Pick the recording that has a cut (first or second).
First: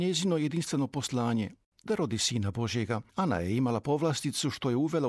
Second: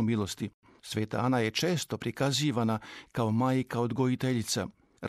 first